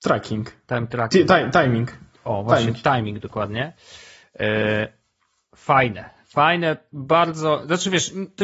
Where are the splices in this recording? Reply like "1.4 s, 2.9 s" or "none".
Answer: none